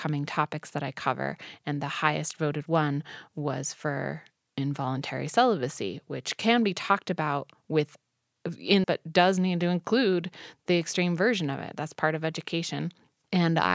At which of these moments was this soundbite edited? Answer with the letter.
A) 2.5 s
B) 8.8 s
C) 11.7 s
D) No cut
B